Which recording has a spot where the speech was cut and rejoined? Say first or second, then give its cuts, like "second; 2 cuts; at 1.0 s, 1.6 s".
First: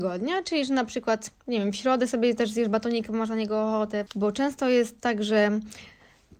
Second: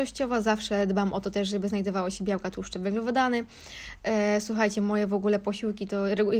first; 2 cuts; at 1.4 s, 4.1 s